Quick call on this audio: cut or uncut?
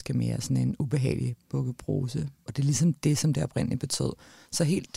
cut